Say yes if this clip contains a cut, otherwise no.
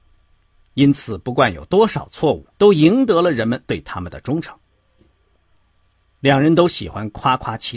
yes